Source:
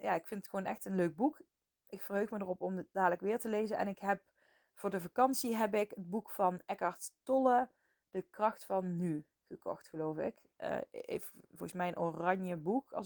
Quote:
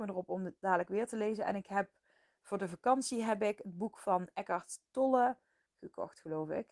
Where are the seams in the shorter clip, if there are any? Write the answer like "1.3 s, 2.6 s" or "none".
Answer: 5.7 s